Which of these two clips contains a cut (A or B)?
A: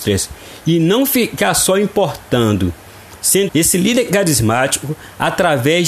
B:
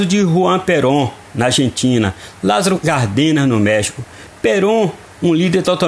A